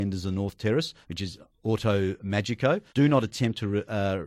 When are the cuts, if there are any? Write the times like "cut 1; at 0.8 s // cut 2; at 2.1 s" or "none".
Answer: cut 1; at 1.0 s // cut 2; at 2.9 s